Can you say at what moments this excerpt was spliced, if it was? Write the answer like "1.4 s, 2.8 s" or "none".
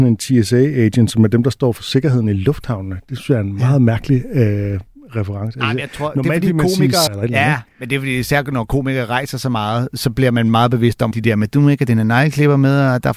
7.1 s, 11.1 s

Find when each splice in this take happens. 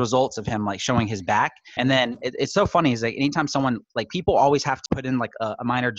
1.8 s, 4.9 s

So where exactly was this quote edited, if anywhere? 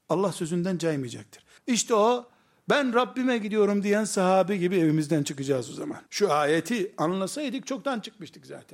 1.6 s, 6.1 s

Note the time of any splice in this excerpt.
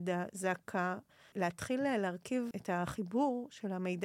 1.3 s, 2.5 s

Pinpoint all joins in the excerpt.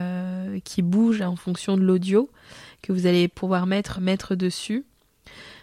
4.0 s

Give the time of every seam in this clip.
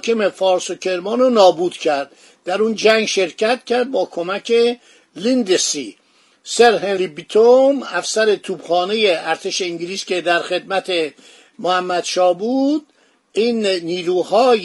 none

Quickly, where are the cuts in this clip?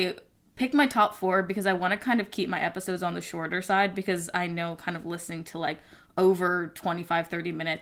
none

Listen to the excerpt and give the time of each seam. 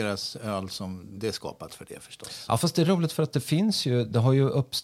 1.2 s

